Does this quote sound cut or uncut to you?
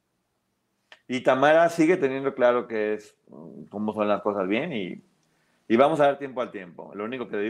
uncut